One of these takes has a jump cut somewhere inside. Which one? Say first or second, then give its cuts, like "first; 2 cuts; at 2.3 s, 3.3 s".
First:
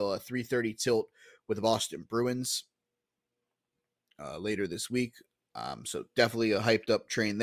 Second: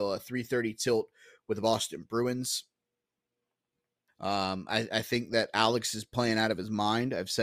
second; 1 cut; at 4.1 s